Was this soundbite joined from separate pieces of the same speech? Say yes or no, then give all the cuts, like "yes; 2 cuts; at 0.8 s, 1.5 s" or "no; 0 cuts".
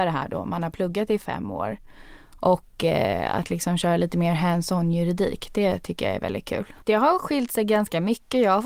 yes; 1 cut; at 6.8 s